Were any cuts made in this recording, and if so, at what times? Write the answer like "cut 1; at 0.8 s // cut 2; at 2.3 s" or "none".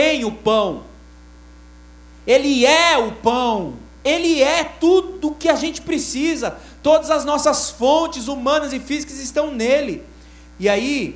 cut 1; at 4.0 s